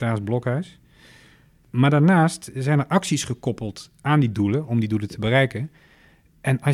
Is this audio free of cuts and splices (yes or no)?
yes